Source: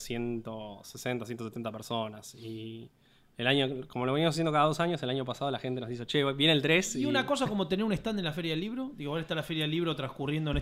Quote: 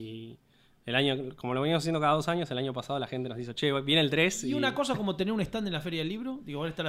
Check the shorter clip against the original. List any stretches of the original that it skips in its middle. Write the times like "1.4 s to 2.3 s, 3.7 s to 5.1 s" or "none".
none